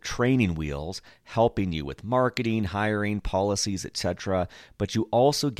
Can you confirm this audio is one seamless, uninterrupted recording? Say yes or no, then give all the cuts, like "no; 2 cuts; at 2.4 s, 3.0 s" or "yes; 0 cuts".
yes; 0 cuts